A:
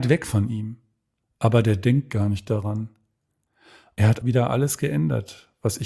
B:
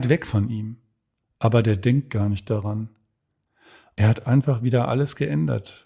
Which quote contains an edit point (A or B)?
A